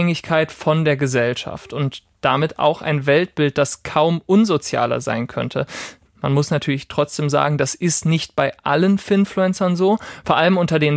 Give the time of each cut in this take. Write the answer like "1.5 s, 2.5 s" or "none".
6.1 s